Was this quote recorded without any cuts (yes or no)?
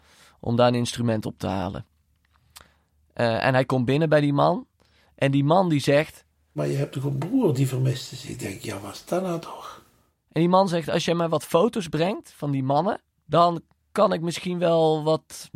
yes